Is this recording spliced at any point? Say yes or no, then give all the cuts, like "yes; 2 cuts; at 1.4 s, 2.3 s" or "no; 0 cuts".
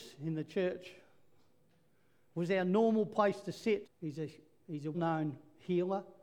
yes; 2 cuts; at 3.8 s, 4.9 s